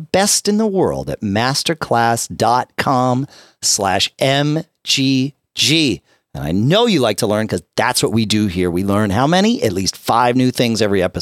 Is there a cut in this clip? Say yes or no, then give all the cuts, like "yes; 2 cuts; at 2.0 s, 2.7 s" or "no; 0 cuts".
no; 0 cuts